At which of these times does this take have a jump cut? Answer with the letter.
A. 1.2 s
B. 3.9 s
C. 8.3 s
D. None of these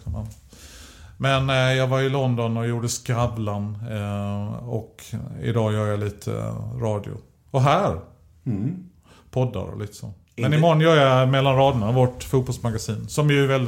D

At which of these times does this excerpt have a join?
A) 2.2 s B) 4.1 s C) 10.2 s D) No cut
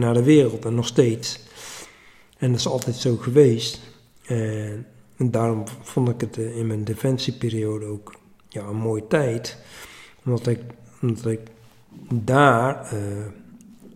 D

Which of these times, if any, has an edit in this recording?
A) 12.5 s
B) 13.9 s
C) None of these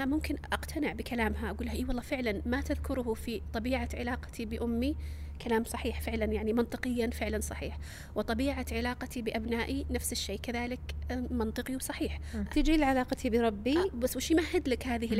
A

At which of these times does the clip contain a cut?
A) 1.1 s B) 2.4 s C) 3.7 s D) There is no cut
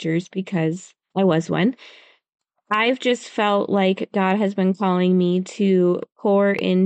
A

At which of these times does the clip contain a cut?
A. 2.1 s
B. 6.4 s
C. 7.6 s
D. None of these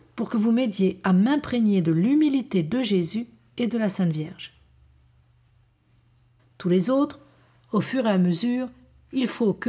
B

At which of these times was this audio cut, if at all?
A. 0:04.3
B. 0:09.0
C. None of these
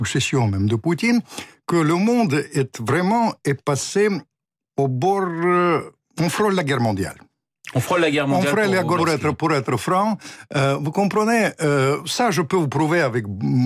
B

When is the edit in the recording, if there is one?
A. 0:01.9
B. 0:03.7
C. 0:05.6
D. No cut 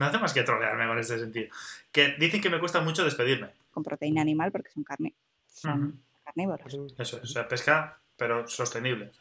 B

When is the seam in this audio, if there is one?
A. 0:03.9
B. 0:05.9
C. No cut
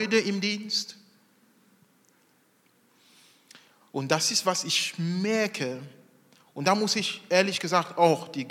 C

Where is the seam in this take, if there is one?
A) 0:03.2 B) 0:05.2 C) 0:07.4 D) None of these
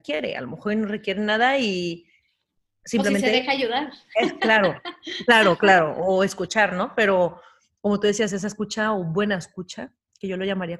D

